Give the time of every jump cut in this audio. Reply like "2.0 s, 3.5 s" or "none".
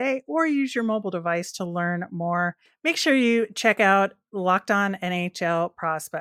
2.7 s